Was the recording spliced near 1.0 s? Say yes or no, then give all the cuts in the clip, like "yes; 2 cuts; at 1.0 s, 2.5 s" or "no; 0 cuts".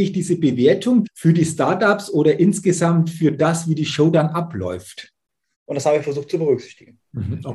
yes; 2 cuts; at 1.0 s, 5.5 s